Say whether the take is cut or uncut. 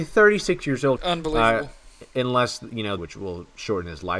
cut